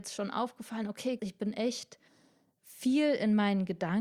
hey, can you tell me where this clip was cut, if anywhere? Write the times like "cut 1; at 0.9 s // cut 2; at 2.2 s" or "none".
cut 1; at 1.2 s